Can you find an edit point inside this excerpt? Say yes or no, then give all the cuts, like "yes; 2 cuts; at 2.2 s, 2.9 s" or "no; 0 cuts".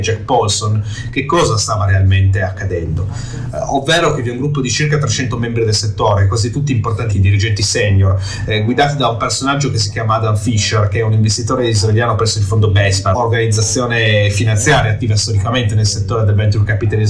yes; 2 cuts; at 7.1 s, 13.1 s